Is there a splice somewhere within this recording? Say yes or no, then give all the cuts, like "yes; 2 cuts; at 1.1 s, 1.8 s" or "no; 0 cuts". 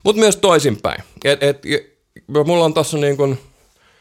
no; 0 cuts